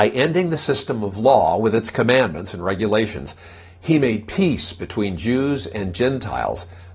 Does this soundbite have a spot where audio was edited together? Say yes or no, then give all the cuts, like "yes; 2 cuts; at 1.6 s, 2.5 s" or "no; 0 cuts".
no; 0 cuts